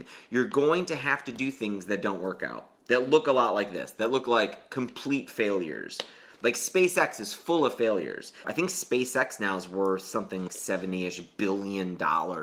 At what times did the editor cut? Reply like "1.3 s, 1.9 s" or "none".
8.4 s, 10.5 s